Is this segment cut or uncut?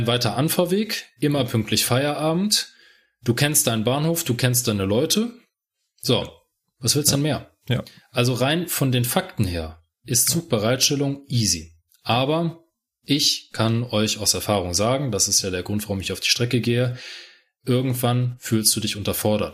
uncut